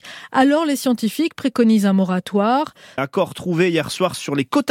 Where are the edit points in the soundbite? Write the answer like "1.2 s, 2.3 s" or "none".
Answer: 3.0 s